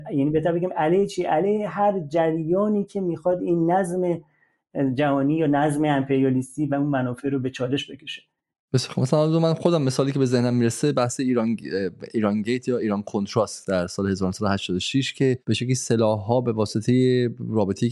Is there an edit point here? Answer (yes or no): yes